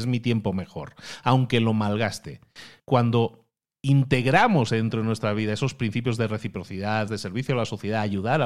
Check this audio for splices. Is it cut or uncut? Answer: cut